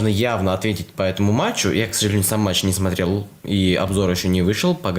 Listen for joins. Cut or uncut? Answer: uncut